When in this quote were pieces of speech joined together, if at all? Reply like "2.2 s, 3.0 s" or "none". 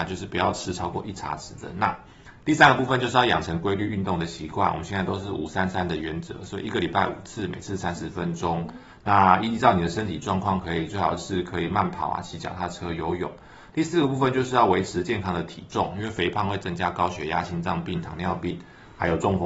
none